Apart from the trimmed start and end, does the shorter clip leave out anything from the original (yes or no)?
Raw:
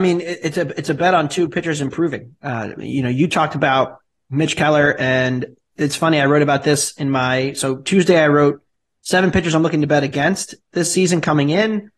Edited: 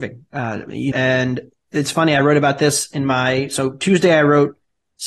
yes